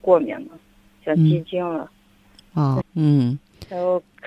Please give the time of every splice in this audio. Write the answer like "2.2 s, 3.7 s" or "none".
2.8 s